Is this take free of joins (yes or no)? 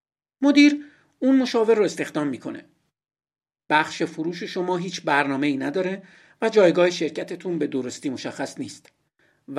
no